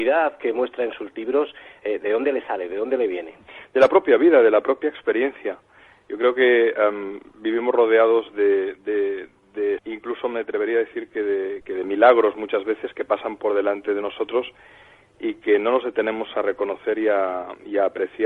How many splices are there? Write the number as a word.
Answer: two